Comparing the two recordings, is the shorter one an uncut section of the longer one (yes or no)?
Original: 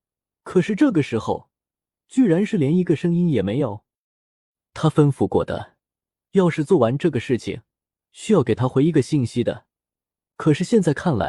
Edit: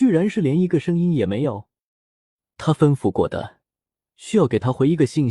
no